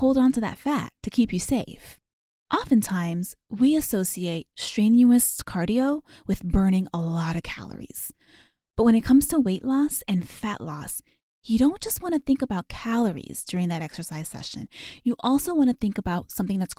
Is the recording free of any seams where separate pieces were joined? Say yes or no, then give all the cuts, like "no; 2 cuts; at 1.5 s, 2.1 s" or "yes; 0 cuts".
yes; 0 cuts